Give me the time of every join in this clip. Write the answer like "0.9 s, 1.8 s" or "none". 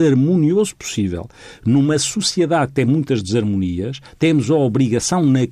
none